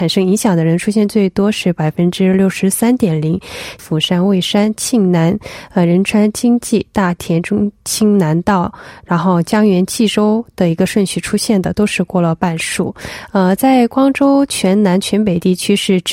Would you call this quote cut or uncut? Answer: cut